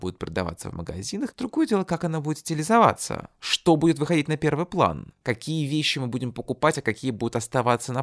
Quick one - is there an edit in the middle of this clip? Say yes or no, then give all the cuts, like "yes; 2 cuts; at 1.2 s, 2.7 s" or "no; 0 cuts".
no; 0 cuts